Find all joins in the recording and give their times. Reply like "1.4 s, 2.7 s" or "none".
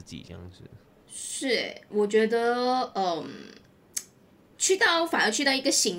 none